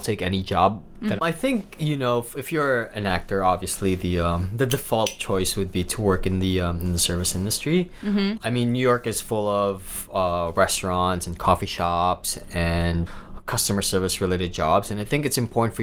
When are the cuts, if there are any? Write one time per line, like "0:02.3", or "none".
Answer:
0:01.2